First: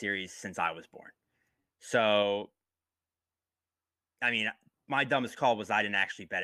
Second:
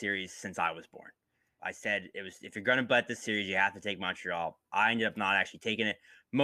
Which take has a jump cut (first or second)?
second